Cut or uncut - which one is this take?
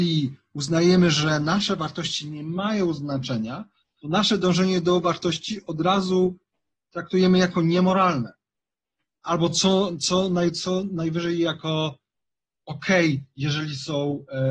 uncut